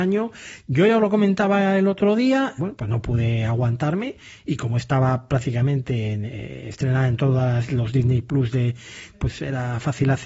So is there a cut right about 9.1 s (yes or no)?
yes